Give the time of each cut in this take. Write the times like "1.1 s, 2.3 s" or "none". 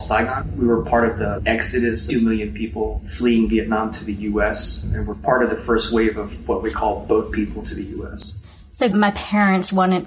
8.9 s